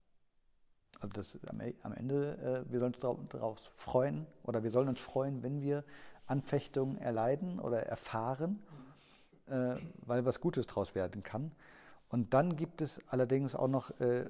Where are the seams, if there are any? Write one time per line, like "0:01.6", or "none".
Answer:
0:03.7
0:09.3